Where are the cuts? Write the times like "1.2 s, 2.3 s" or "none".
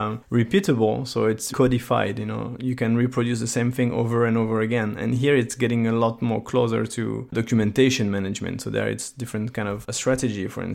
1.5 s, 9.8 s